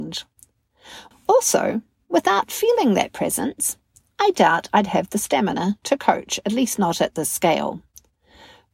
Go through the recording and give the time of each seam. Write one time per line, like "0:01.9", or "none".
0:01.1